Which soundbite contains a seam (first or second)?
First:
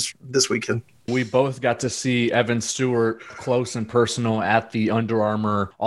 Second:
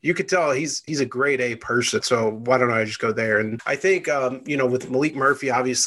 second